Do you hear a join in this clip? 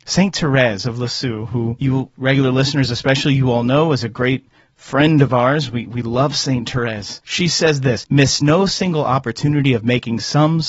no; 0 cuts

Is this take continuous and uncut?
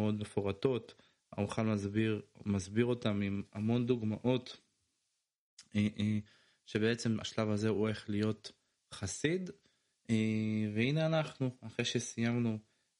yes; 0 cuts

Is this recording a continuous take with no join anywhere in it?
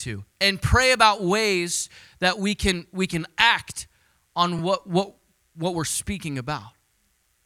yes; 0 cuts

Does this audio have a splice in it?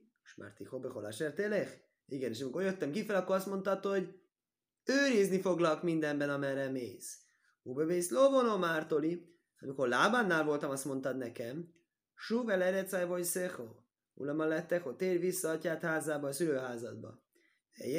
no; 0 cuts

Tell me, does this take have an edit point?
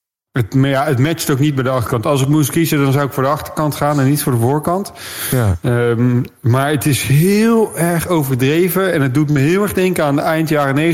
no; 0 cuts

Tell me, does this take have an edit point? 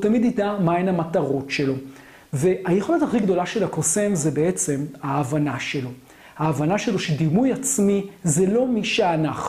no; 0 cuts

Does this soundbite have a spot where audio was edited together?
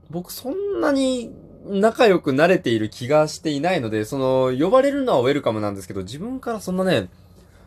no; 0 cuts

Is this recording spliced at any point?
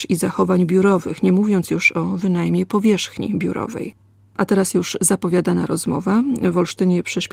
no; 0 cuts

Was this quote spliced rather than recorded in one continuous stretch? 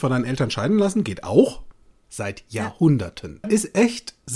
yes; 2 cuts; at 2.0 s, 3.4 s

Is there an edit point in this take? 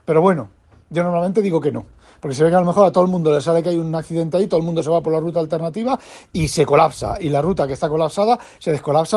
no; 0 cuts

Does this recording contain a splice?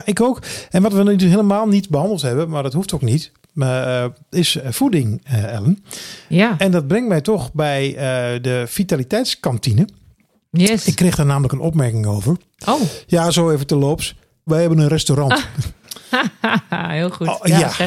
yes; 1 cut; at 14.5 s

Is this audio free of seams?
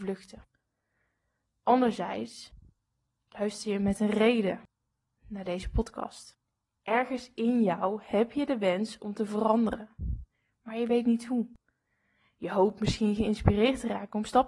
yes; 0 cuts

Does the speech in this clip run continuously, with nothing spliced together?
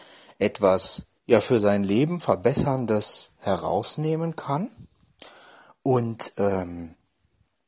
yes; 0 cuts

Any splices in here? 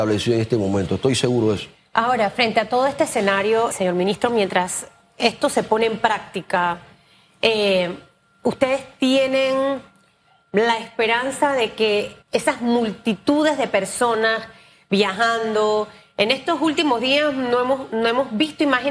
yes; 2 cuts; at 3.7 s, 12.2 s

